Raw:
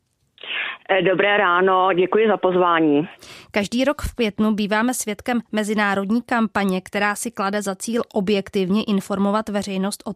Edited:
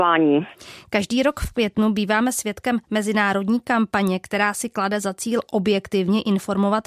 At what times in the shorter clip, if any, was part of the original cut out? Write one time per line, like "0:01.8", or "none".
none